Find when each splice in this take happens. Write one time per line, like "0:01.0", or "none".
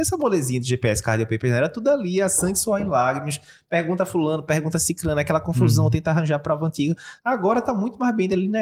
none